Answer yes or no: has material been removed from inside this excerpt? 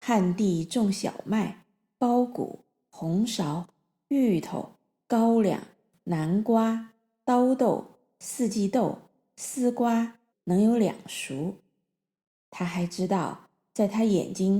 yes